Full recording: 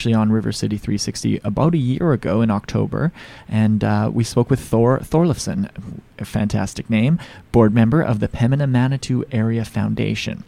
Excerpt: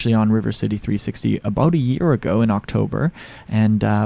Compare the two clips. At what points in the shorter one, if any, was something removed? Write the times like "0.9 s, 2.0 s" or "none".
none